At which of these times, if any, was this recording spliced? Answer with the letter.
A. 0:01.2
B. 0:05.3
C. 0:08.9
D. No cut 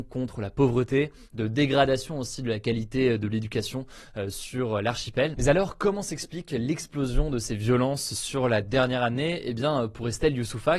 B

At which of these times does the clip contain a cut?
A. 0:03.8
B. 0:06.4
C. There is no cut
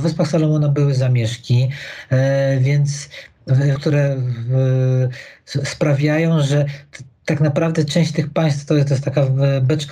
A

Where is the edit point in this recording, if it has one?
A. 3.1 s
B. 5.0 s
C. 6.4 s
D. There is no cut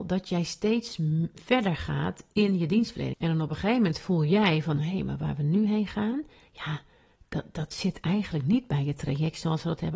A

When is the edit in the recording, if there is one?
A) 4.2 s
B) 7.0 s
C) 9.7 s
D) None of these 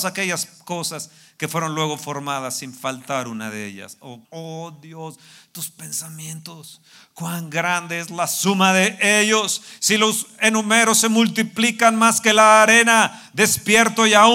A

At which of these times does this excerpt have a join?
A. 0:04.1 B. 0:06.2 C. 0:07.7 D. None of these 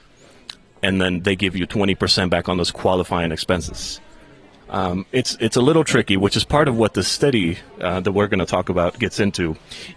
C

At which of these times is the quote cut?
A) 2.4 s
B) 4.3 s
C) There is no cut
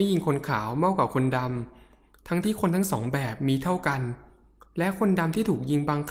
A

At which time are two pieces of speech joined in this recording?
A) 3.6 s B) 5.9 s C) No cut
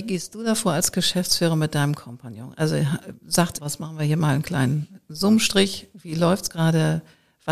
A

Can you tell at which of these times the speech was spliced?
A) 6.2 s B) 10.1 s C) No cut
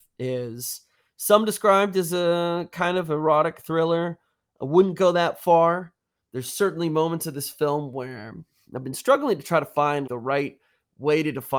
B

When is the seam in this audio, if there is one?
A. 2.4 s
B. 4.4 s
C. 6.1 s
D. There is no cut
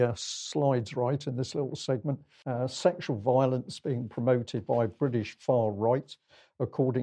A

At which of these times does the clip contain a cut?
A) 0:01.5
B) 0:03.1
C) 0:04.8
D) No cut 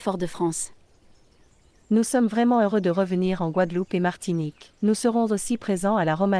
C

